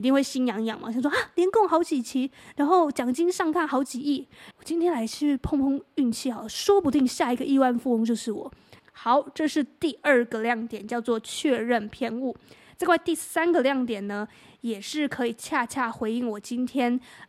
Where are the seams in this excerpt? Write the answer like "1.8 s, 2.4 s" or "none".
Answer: 4.5 s, 8.8 s

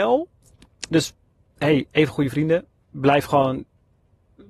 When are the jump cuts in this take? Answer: none

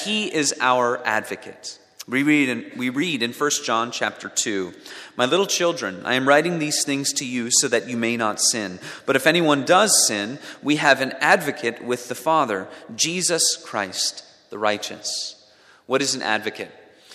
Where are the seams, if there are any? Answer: none

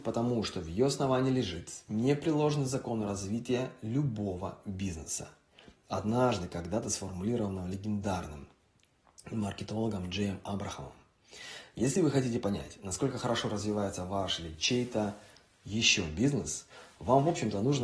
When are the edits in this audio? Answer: none

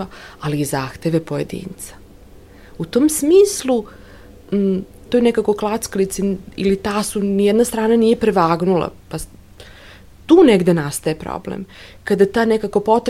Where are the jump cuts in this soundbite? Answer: 5.1 s

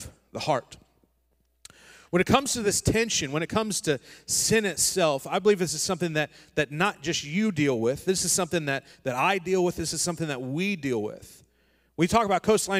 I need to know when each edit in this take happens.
none

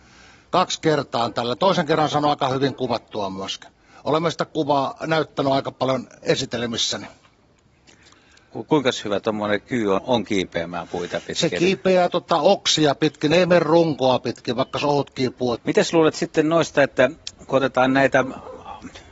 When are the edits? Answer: 10.0 s, 15.6 s

